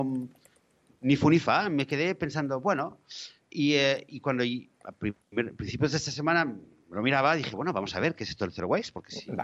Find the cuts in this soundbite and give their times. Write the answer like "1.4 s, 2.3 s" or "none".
none